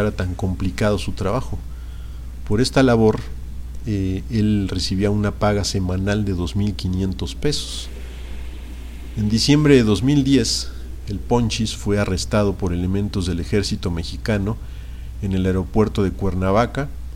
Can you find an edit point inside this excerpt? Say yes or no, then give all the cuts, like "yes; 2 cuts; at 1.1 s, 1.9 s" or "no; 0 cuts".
no; 0 cuts